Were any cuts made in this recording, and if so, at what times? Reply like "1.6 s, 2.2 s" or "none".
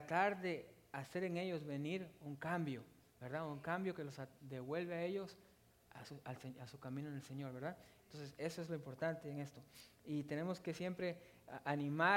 none